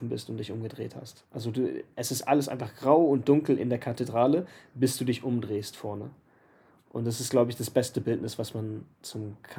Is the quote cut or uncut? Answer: uncut